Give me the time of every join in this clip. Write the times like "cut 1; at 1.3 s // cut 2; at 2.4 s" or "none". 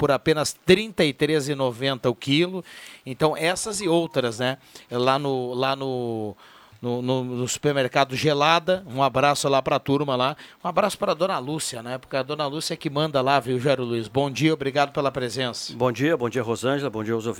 none